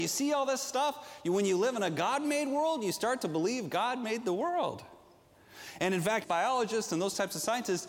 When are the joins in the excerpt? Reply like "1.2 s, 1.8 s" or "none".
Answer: 6.2 s